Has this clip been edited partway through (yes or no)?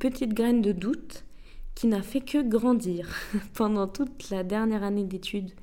no